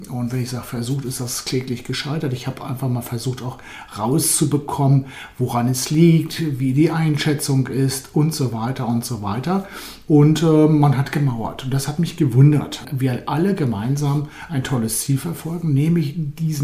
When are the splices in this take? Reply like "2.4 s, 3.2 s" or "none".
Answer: 12.8 s